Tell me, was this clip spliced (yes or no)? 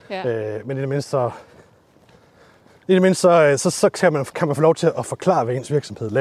no